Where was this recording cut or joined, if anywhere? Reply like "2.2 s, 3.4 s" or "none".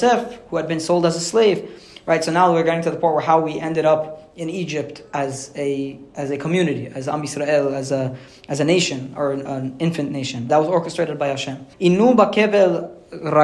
10.5 s, 11.7 s